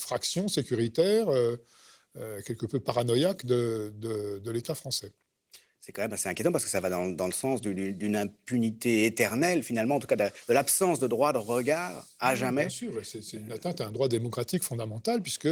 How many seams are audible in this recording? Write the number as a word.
zero